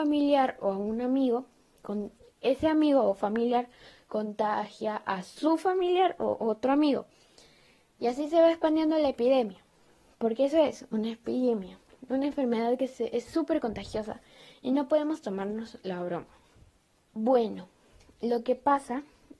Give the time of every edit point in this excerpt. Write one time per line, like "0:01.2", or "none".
0:17.1